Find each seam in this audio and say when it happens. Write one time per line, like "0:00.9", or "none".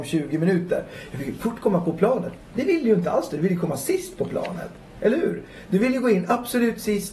none